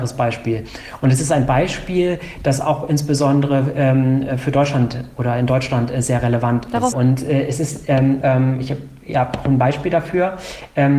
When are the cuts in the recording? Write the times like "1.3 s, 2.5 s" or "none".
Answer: 6.9 s, 8.2 s